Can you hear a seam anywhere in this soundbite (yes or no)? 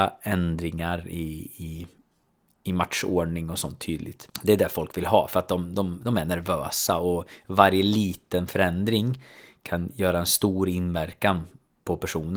no